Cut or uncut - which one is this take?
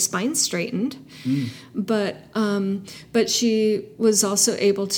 uncut